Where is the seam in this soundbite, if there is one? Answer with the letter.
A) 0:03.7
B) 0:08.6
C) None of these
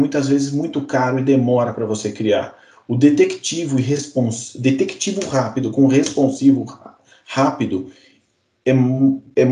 C